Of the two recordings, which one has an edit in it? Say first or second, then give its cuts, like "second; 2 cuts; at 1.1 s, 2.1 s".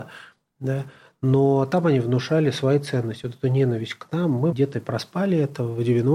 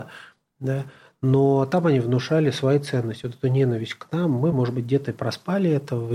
first; 1 cut; at 4.5 s